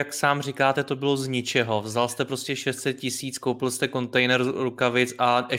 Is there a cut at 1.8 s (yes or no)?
no